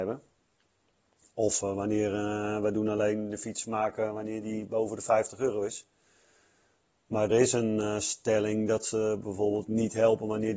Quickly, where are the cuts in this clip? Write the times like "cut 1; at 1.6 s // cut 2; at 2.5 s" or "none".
cut 1; at 7.3 s